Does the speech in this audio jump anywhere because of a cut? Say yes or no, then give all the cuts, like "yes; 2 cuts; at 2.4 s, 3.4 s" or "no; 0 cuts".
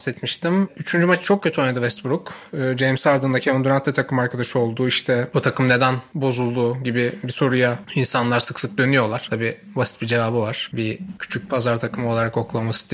no; 0 cuts